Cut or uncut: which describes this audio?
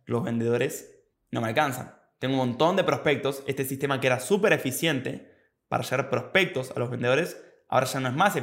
uncut